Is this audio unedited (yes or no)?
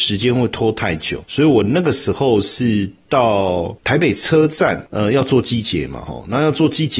yes